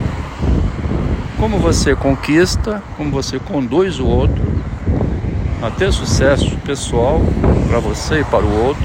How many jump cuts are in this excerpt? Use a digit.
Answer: 1